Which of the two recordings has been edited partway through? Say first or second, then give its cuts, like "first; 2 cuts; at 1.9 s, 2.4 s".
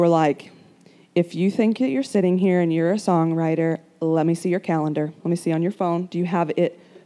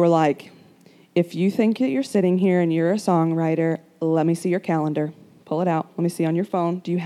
first; 1 cut; at 5.2 s